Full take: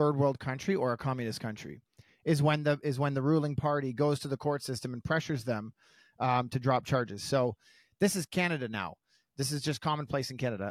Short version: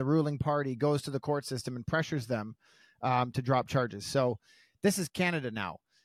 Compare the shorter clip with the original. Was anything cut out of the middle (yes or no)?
no